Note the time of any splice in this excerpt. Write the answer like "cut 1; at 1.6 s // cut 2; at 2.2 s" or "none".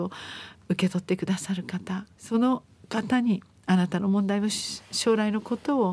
cut 1; at 2.2 s